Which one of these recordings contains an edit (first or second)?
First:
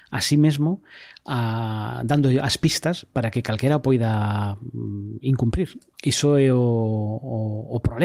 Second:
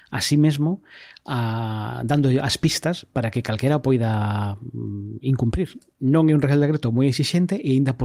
first